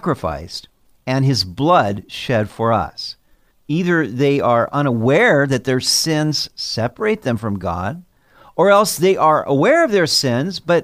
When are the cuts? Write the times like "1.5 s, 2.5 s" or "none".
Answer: 3.5 s